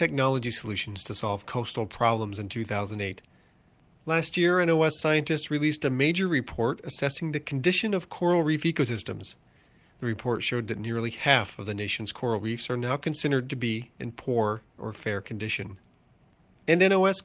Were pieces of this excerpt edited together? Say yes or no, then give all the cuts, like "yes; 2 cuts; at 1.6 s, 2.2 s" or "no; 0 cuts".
no; 0 cuts